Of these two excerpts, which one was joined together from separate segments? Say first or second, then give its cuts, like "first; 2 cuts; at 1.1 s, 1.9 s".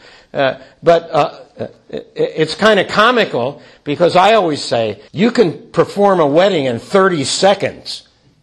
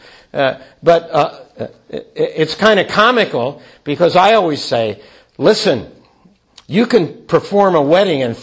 first; 1 cut; at 5.1 s